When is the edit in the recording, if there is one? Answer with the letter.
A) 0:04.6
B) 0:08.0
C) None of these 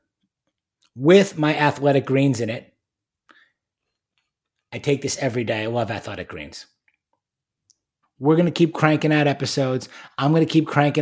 B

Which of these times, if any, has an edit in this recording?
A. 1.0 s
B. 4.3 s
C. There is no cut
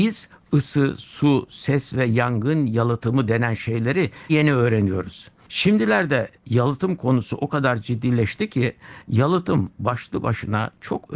B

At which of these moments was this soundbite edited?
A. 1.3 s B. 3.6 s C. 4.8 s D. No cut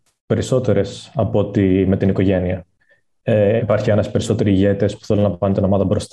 B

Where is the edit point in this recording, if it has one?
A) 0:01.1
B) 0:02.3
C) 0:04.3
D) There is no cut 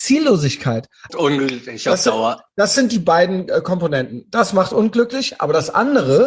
A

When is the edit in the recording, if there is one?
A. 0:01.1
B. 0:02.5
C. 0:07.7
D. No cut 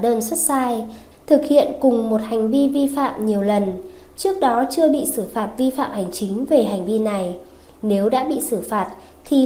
A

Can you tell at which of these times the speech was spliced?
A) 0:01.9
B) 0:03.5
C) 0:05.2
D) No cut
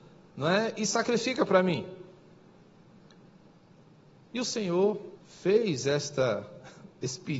C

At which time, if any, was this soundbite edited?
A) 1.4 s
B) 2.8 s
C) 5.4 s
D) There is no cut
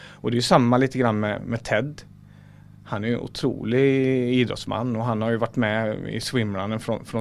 A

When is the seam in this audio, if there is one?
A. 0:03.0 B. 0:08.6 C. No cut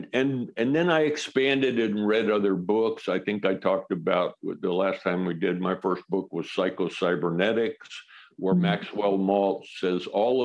C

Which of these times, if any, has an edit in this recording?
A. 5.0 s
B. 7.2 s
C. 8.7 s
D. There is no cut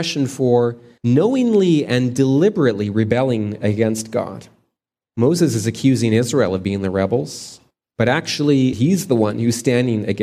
C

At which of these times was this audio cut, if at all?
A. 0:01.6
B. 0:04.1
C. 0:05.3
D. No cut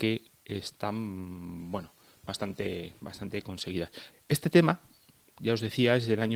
B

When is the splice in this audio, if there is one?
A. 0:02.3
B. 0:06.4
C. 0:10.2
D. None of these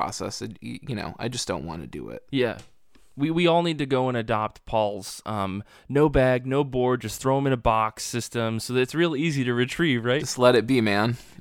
A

